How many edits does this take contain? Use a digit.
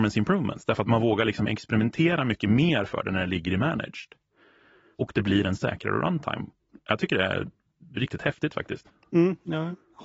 0